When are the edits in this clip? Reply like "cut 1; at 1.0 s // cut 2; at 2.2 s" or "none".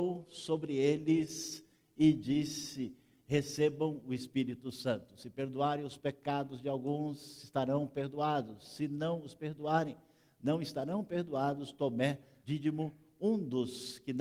cut 1; at 12.4 s